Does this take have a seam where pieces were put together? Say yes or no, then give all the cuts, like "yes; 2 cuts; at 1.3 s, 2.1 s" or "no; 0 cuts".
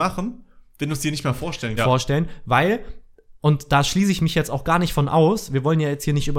yes; 1 cut; at 1.8 s